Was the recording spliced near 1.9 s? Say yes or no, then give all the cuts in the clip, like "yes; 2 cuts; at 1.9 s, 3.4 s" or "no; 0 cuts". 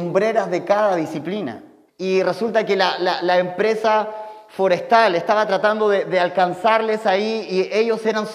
yes; 1 cut; at 1.9 s